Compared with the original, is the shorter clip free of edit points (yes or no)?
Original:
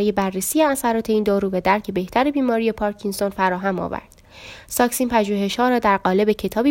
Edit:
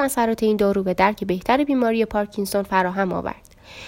yes